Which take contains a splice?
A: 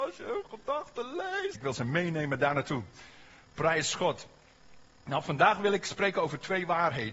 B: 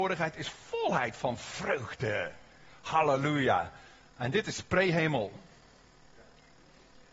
A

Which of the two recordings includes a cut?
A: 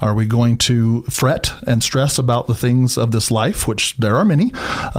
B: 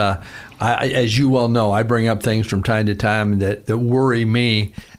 B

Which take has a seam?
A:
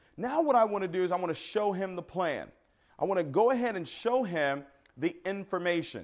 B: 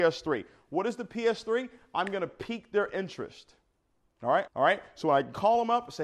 B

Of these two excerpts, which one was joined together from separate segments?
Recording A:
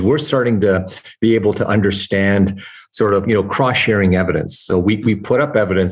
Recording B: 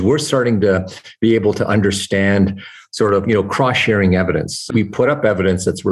B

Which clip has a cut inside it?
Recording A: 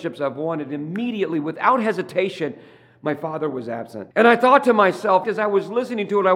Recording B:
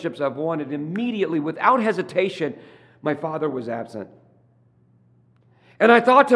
A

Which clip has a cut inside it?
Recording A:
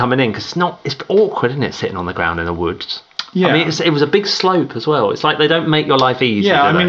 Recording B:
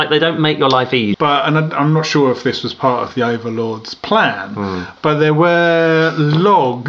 B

